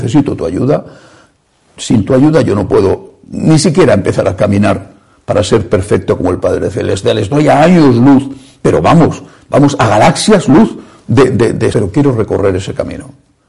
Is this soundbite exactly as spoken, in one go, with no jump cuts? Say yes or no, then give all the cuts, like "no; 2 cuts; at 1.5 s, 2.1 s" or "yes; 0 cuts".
no; 1 cut; at 11.7 s